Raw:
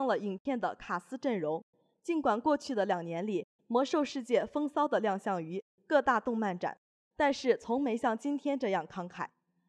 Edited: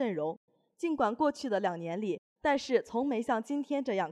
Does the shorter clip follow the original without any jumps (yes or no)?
no